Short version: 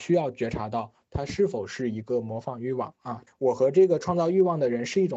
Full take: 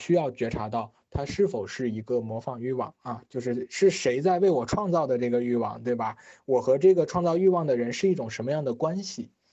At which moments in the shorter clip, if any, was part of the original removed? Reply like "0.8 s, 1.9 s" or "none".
3.3 s

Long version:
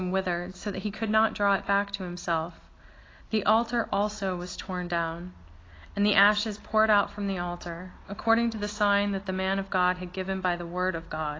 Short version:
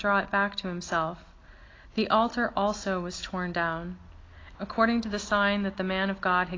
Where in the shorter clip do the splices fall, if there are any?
4.5 s

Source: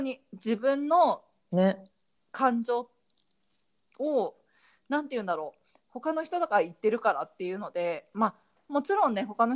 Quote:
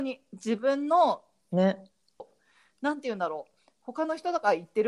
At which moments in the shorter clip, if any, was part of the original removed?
2.2 s

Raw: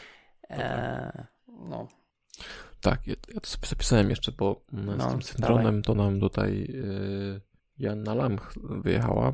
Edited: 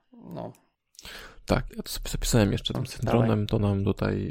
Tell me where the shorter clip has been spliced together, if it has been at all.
1.7 s, 2.7 s

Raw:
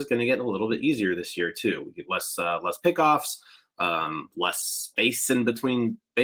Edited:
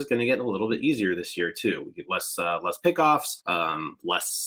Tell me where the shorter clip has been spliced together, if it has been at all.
3.4 s

